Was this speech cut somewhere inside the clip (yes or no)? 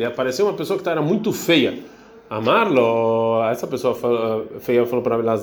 no